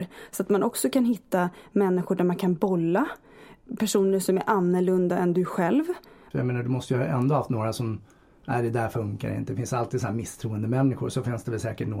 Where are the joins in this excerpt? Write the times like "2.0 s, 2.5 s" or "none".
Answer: 6.3 s

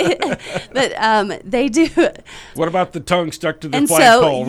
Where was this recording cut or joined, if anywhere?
2.6 s

